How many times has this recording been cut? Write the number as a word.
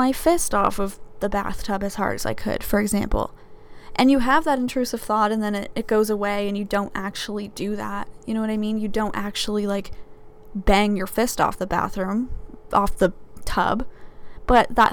zero